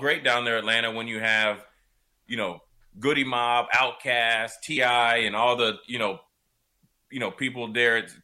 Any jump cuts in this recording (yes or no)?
no